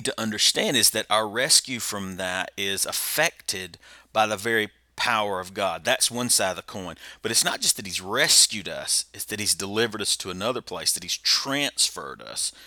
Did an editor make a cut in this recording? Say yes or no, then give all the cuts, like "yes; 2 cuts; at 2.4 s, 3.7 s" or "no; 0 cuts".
no; 0 cuts